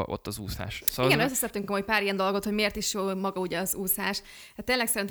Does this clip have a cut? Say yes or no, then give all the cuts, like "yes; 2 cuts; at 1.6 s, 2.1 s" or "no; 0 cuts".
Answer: no; 0 cuts